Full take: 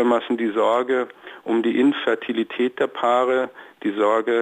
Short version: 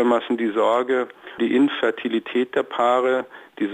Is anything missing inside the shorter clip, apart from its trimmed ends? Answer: yes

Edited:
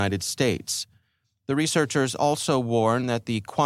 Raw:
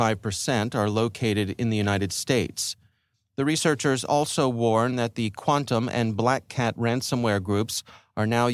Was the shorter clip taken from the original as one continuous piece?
yes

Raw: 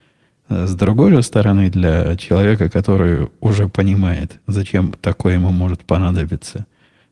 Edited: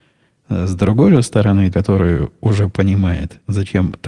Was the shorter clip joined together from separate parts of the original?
yes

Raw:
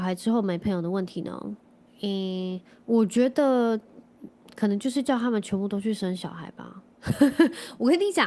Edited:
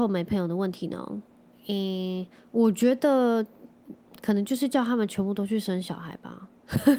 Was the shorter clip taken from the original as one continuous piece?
yes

